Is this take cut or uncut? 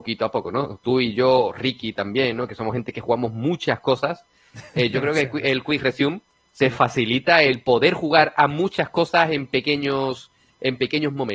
uncut